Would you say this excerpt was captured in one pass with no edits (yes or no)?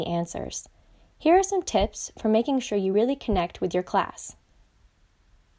yes